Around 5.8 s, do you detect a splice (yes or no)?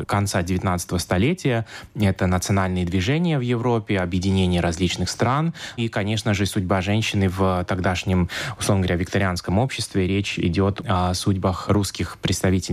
yes